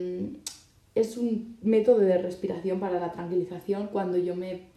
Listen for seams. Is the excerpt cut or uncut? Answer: uncut